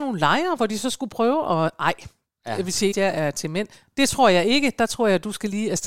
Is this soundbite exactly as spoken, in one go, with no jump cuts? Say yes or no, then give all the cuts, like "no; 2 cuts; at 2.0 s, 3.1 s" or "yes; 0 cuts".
no; 1 cut; at 2.9 s